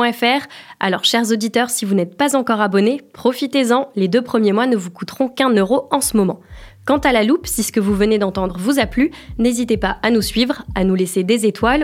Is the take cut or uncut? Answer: uncut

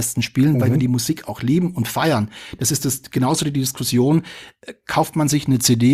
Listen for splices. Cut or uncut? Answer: uncut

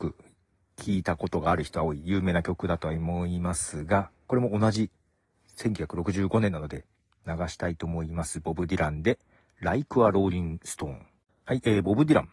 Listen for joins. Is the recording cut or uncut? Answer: uncut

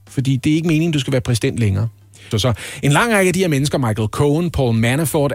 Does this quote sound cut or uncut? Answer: cut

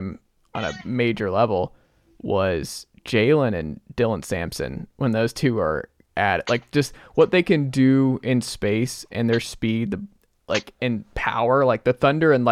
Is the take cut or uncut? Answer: uncut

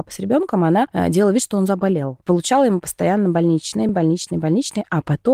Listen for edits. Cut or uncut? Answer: uncut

